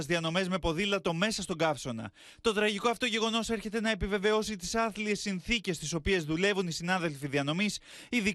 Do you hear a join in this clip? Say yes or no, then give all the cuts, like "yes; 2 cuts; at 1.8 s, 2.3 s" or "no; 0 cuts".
no; 0 cuts